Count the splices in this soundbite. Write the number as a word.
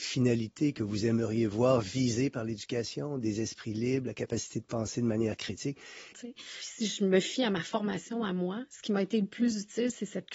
one